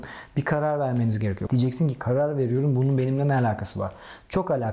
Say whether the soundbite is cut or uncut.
cut